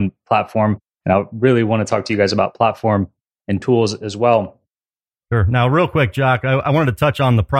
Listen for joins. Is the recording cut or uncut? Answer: uncut